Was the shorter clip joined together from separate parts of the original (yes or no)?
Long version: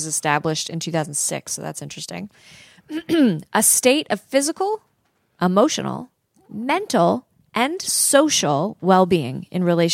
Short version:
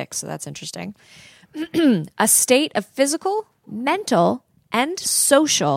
yes